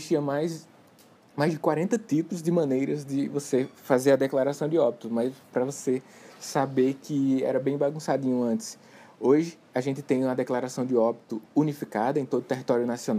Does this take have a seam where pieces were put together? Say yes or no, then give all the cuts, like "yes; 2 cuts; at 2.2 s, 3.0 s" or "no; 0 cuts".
no; 0 cuts